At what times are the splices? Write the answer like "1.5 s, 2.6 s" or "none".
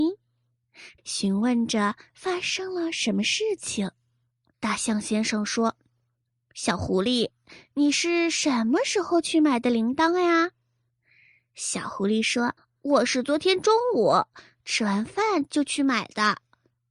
1.0 s, 4.5 s, 12.6 s